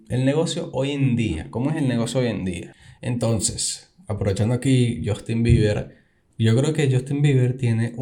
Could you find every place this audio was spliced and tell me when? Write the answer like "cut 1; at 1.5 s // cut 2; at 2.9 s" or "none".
none